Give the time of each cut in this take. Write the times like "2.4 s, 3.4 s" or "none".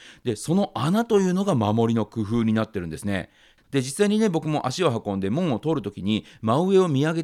3.6 s